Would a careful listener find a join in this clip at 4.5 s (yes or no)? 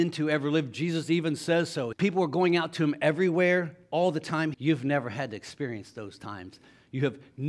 yes